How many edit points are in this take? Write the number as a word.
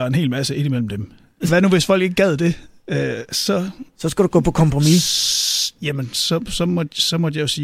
one